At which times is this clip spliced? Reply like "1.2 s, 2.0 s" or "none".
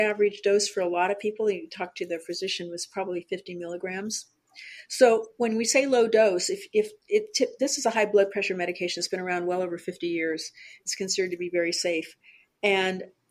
none

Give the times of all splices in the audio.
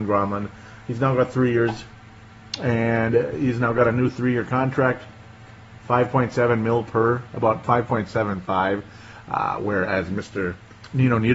none

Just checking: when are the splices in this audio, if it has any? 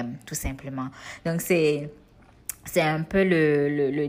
none

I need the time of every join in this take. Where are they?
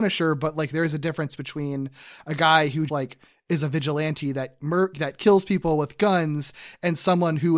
2.9 s

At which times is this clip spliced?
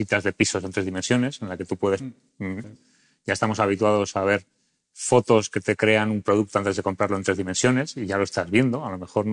2.6 s

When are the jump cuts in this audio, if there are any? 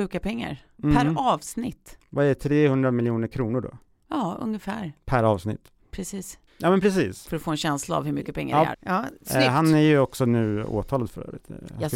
6.5 s, 8.7 s

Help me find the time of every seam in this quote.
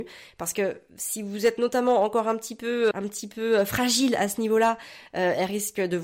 2.9 s

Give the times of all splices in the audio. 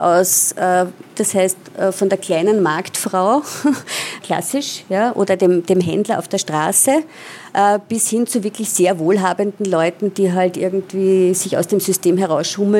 1.1 s, 4.2 s

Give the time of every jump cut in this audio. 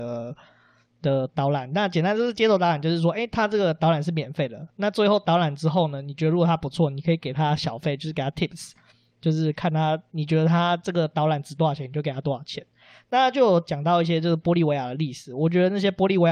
none

